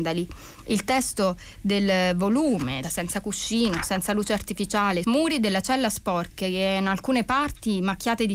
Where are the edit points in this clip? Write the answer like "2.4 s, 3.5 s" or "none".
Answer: 2.8 s, 5.0 s

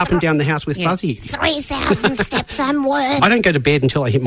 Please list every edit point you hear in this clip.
3.2 s

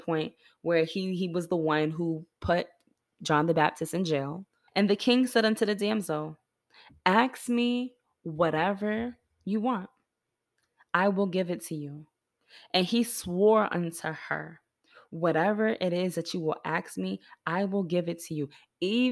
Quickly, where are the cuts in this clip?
4.7 s

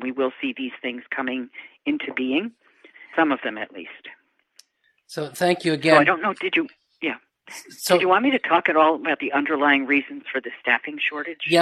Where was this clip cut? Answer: 3.1 s

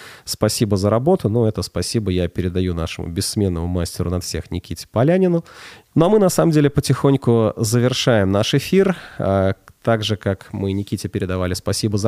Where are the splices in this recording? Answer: 5.9 s

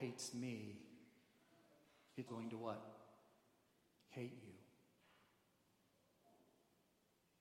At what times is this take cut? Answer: 2.3 s

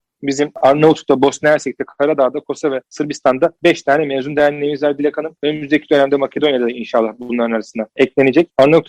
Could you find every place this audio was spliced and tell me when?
none

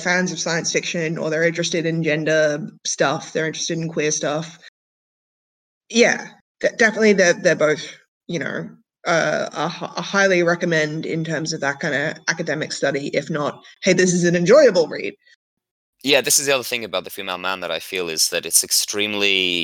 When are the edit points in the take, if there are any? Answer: none

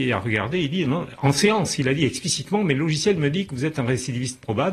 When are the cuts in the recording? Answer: none

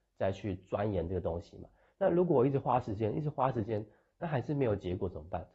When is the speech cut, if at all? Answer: none

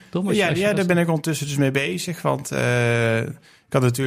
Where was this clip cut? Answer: none

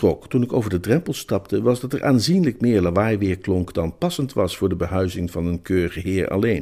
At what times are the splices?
none

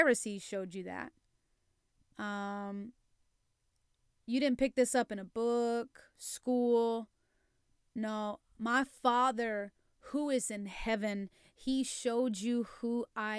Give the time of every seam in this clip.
none

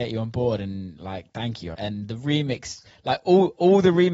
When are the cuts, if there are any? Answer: 1.7 s

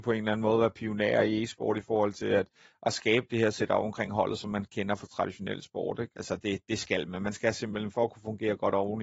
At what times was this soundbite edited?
6.1 s

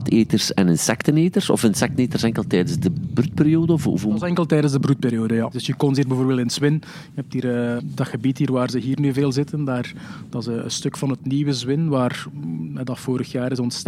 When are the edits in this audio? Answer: 5.5 s, 7.8 s

